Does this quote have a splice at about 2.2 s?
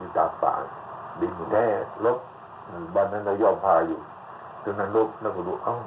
no; 0 cuts

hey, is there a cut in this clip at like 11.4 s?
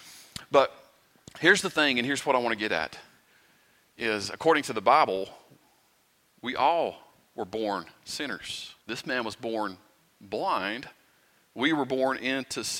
no; 1 cut; at 8.8 s

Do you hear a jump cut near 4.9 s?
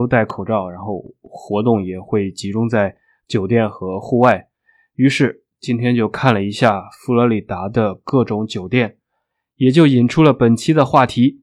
no; 0 cuts

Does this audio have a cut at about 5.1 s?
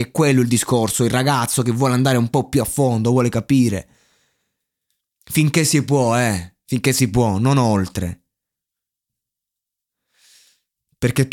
no; 0 cuts

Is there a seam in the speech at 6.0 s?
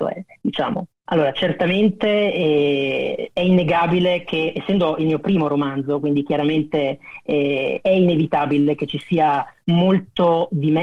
no; 1 cut; at 1.1 s

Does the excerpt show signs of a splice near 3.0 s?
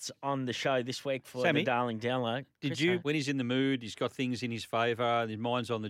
yes; 1 cut; at 3.0 s

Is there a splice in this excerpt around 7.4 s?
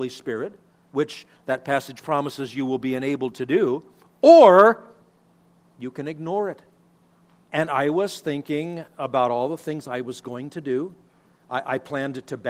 yes; 1 cut; at 7.4 s

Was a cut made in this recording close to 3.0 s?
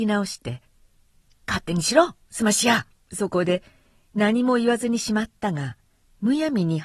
yes; 1 cut; at 3.0 s

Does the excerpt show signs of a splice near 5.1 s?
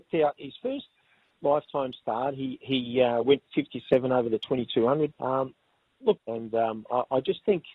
yes; 2 cuts; at 5.1 s, 6.2 s

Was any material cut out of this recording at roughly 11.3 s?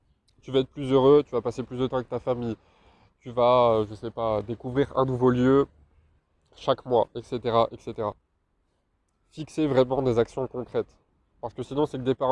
no; 0 cuts

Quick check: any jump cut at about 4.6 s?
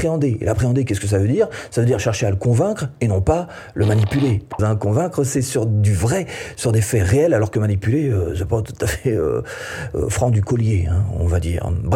yes; 1 cut; at 4.6 s

